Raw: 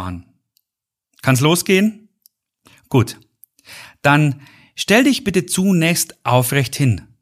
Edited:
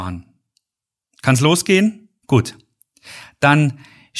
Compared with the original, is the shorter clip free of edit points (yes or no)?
no